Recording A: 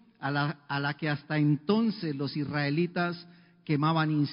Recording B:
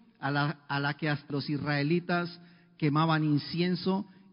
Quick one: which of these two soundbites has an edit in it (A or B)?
B